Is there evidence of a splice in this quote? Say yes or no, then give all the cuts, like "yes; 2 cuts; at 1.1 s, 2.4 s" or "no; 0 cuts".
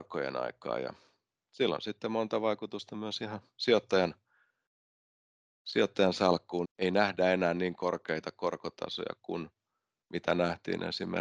yes; 1 cut; at 6.6 s